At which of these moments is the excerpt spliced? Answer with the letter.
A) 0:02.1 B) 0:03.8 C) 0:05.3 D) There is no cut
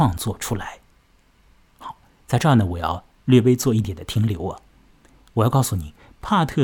B